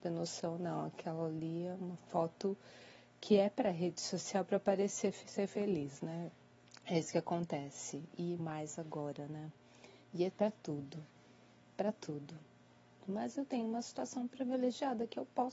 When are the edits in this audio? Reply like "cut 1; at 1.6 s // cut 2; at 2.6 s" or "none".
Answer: cut 1; at 8.4 s // cut 2; at 13.0 s